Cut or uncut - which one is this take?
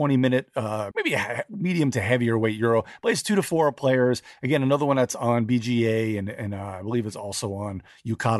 cut